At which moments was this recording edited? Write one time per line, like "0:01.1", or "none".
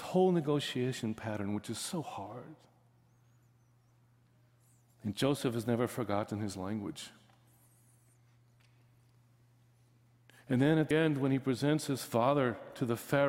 0:10.9